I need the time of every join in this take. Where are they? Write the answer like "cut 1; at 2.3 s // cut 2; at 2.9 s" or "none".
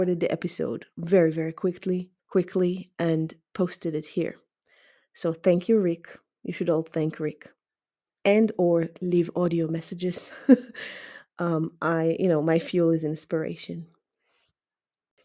cut 1; at 2.2 s